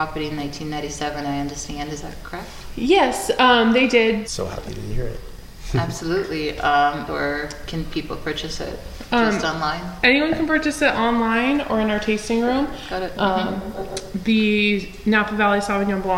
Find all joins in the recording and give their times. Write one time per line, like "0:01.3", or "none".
0:04.2
0:07.1
0:13.1